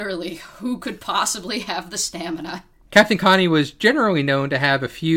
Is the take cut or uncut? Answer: uncut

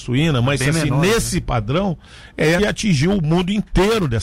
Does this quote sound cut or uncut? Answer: cut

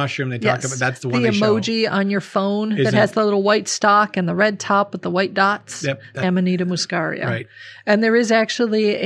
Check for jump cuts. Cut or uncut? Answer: cut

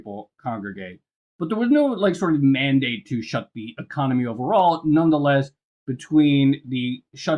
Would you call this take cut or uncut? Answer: uncut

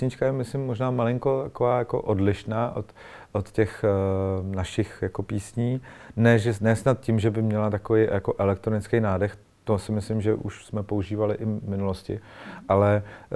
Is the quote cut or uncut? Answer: uncut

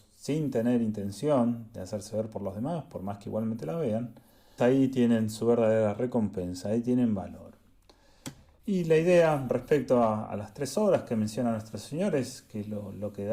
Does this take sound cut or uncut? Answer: cut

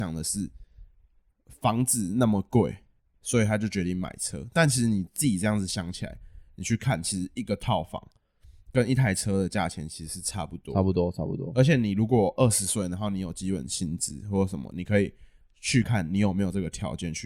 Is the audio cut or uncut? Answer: cut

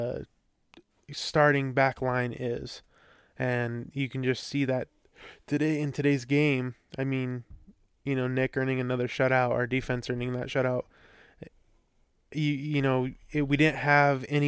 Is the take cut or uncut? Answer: uncut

